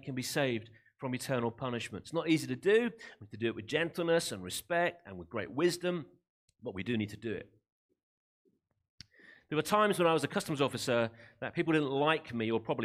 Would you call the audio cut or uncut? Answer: uncut